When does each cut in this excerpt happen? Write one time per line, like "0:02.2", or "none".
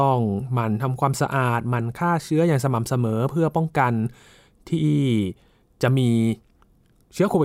none